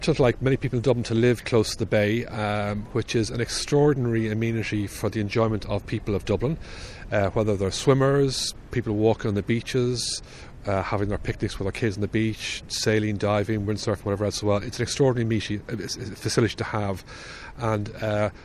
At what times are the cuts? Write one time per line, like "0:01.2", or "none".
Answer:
none